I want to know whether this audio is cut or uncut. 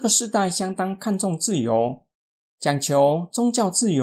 uncut